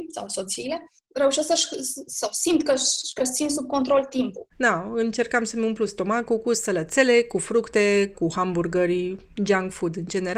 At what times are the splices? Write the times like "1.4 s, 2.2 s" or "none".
4.5 s, 8.1 s